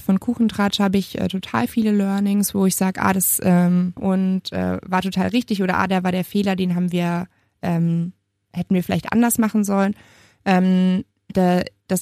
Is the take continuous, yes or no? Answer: no